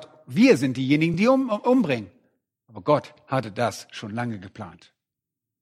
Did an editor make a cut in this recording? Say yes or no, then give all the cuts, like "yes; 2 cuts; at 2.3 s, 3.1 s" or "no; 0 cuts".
no; 0 cuts